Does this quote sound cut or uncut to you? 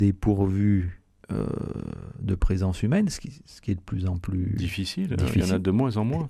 uncut